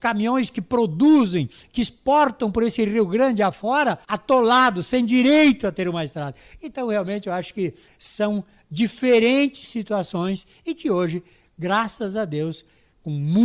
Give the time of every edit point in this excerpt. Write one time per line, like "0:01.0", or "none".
0:04.0